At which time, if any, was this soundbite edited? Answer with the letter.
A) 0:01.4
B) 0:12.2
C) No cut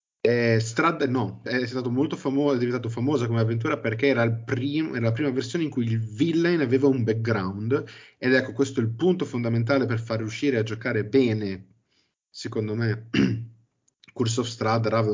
A